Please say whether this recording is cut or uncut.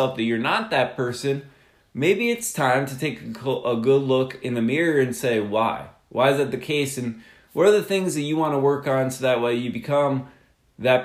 uncut